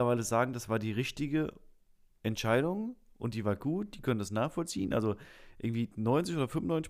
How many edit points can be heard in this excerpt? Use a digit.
0